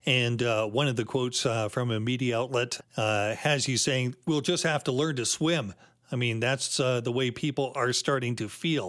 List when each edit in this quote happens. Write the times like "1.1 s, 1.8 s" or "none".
2.8 s